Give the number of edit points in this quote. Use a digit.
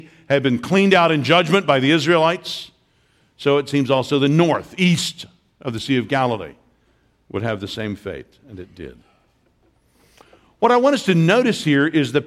0